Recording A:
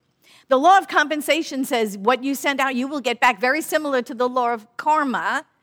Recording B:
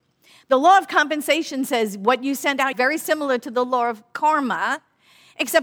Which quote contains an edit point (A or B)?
B